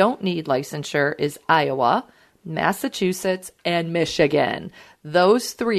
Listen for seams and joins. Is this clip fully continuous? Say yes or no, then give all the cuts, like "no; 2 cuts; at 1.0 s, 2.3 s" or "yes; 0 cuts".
yes; 0 cuts